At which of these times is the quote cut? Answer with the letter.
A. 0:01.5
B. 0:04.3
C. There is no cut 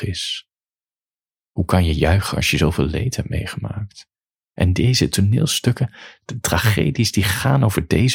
C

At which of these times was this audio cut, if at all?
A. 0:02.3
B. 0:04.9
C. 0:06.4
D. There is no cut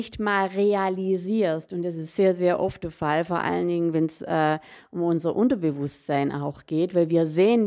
D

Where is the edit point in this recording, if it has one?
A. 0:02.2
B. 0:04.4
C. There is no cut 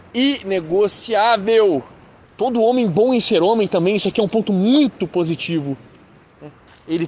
A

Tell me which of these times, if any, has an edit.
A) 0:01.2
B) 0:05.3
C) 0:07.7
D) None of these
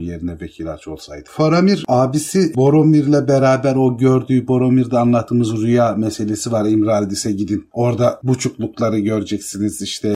D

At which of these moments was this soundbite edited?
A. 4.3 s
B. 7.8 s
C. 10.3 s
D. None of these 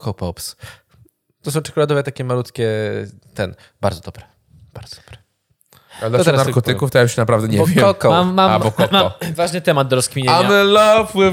D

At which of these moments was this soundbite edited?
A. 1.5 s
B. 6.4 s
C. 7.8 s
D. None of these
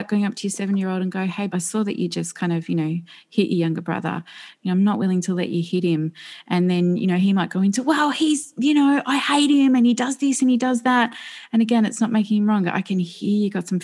A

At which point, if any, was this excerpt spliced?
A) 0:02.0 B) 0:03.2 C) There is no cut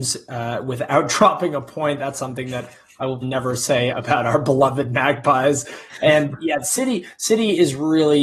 B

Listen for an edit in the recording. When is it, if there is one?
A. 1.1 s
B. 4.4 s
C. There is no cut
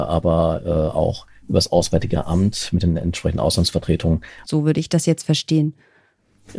B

